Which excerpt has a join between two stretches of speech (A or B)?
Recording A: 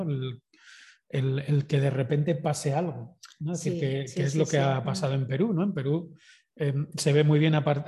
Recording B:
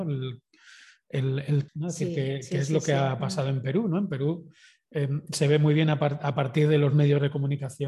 B